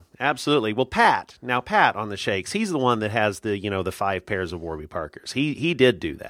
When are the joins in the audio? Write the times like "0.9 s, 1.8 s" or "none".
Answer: none